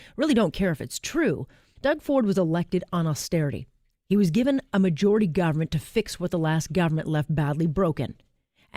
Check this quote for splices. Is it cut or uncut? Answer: cut